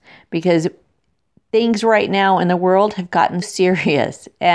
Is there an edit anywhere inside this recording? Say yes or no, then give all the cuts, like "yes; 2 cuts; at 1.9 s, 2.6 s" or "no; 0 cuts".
yes; 1 cut; at 3.4 s